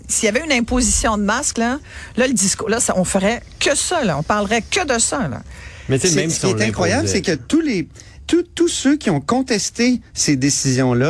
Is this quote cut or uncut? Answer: uncut